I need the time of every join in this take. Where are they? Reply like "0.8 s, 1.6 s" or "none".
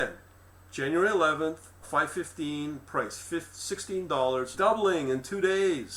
1.8 s, 4.5 s